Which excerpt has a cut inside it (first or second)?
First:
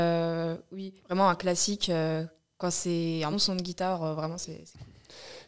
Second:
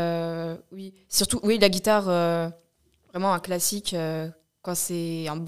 first